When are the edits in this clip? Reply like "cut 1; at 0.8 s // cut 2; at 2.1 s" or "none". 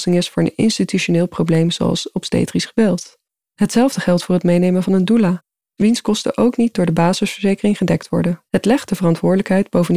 cut 1; at 3.5 s // cut 2; at 8.5 s

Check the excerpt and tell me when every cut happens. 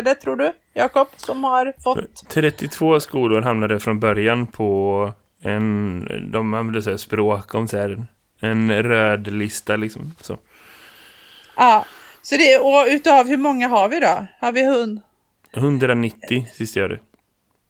none

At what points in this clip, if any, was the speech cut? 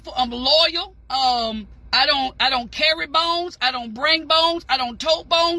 cut 1; at 1.0 s

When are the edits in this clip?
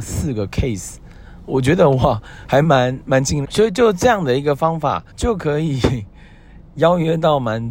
cut 1; at 3.4 s // cut 2; at 5.1 s

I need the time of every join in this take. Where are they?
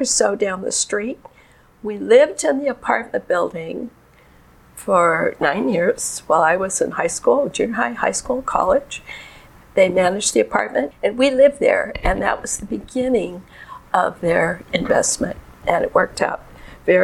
cut 1; at 9.6 s // cut 2; at 10.9 s

